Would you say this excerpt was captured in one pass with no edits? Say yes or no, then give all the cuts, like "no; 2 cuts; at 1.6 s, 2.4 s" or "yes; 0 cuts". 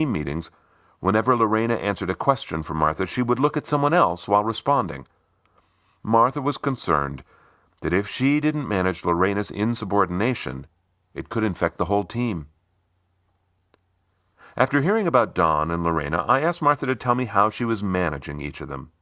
yes; 0 cuts